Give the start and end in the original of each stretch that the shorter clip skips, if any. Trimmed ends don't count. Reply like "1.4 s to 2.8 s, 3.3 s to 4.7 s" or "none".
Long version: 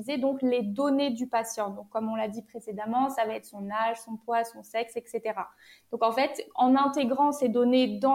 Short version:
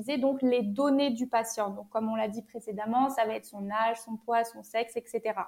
none